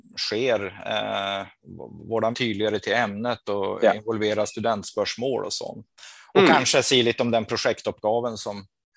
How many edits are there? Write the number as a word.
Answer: one